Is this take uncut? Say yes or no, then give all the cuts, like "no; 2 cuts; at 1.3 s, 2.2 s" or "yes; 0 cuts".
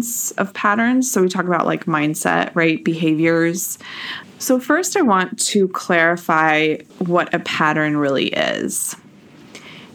no; 2 cuts; at 4.2 s, 6.9 s